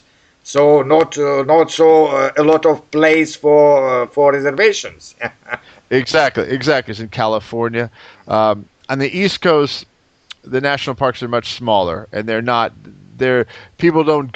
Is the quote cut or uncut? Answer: cut